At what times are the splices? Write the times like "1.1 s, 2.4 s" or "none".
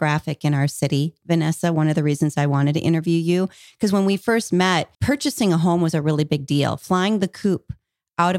4.9 s